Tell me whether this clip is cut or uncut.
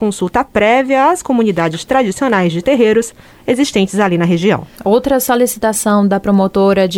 cut